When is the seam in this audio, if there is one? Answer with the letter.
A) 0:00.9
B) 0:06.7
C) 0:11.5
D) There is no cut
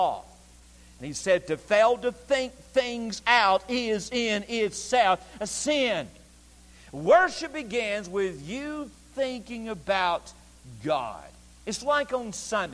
D